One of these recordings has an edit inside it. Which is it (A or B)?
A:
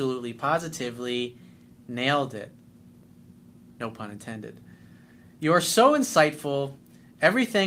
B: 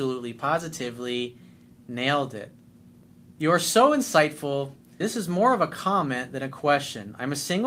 B